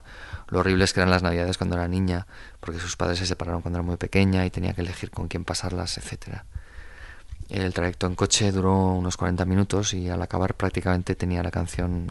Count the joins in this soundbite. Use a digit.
0